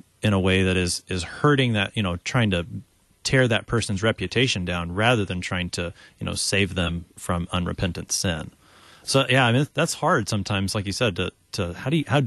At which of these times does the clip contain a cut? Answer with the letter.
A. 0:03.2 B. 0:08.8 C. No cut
C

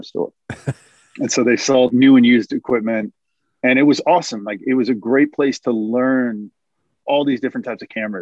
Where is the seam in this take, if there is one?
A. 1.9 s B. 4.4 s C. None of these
A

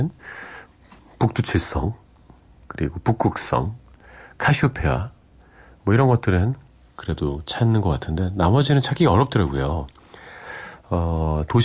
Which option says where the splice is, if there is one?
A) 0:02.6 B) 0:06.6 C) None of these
C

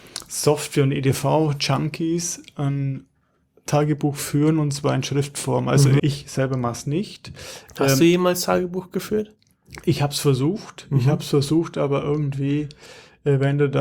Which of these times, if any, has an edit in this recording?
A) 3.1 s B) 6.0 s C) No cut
B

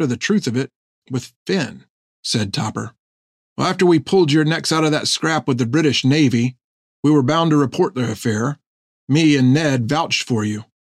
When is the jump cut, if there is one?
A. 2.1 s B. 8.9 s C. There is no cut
A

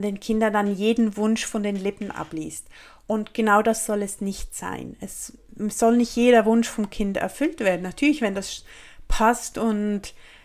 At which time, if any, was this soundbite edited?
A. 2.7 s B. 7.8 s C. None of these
C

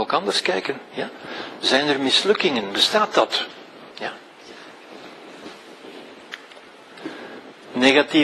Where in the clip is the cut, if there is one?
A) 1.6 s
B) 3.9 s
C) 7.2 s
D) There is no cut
B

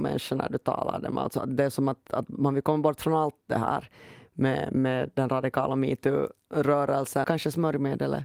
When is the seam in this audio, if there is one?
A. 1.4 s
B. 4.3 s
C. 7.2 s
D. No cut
C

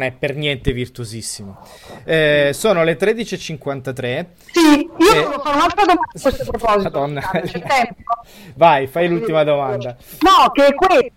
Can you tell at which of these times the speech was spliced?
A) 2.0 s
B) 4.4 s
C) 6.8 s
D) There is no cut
D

